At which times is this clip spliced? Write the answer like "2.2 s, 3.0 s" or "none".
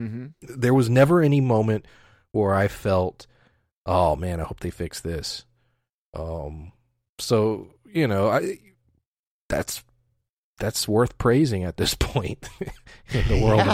none